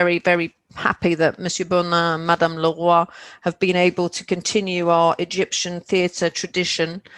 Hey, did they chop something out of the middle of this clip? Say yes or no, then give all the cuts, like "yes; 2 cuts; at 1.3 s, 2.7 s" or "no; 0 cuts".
no; 0 cuts